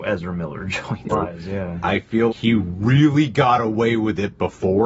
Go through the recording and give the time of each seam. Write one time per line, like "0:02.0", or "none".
0:01.1
0:02.3